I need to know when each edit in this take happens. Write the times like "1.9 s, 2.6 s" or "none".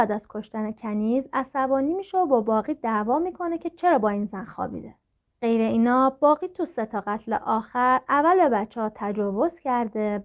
none

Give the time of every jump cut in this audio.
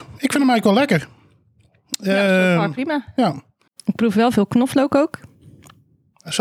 3.7 s

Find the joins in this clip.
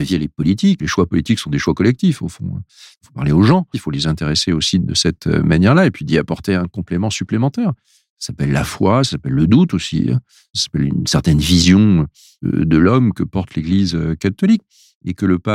3.7 s

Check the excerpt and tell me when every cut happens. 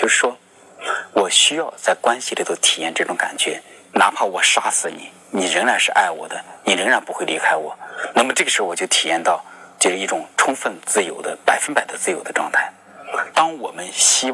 13.3 s

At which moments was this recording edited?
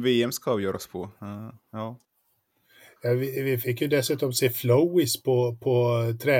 none

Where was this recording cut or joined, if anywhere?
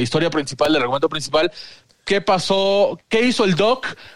1.9 s

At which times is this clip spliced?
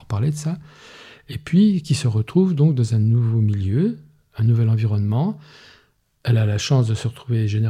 none

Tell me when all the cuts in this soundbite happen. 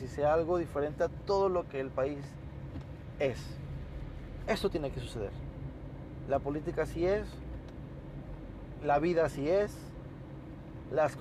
none

